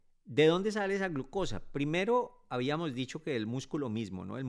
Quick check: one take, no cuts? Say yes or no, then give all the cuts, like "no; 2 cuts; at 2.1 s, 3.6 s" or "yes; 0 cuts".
yes; 0 cuts